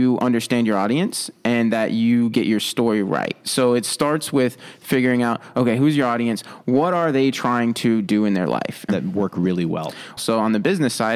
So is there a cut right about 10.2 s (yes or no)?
yes